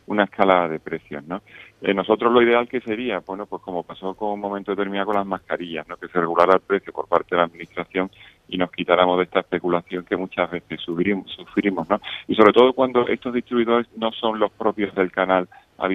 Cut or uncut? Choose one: uncut